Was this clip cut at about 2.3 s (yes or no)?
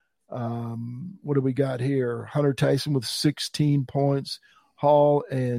no